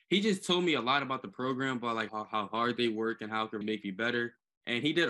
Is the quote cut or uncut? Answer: cut